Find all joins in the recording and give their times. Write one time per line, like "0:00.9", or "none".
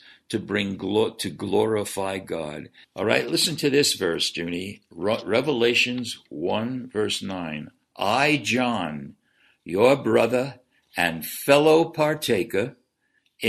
0:02.8

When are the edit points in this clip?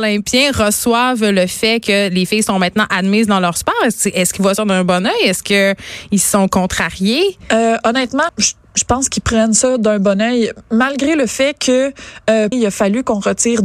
0:08.3
0:12.5

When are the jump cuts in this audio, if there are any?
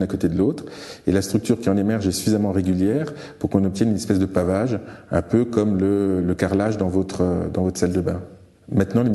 none

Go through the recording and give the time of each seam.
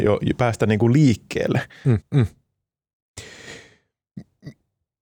0:02.0

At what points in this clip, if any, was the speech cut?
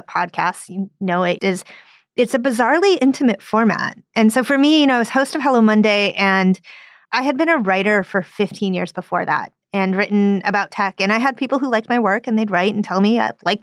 0:01.4

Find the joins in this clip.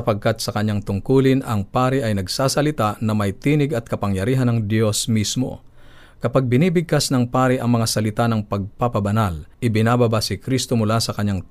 0:09.5

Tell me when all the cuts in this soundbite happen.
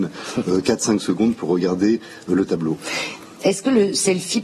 none

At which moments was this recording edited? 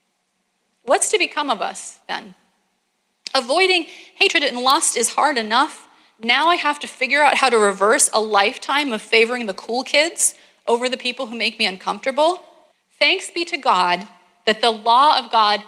0:12.7

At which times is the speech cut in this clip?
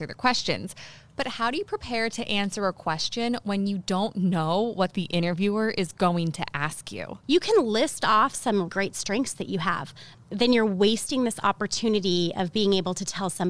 0:07.2
0:08.7
0:10.1

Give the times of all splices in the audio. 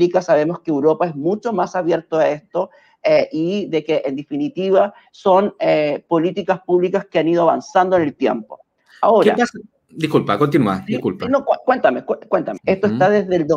0:12.6

